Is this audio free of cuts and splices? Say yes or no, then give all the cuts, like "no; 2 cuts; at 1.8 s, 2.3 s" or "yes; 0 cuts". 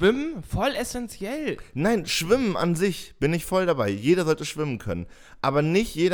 yes; 0 cuts